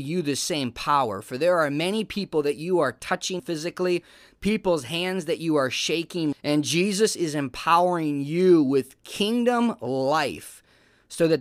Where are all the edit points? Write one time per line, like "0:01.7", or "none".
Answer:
0:03.4
0:06.3